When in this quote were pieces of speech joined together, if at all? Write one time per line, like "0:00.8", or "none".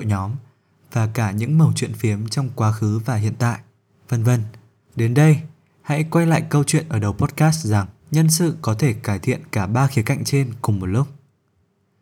0:04.9
0:08.0